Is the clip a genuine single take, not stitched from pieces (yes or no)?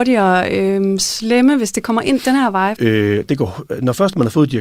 no